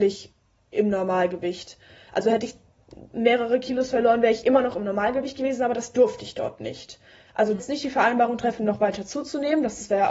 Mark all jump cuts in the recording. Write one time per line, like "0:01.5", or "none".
0:07.6